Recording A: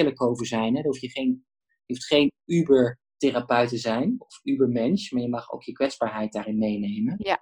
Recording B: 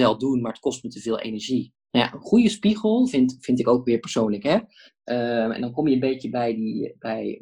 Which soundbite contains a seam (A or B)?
B